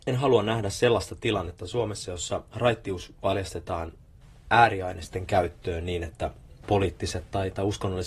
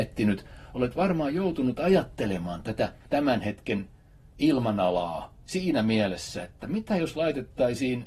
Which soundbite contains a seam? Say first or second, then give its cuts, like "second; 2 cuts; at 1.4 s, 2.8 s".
second; 1 cut; at 3.0 s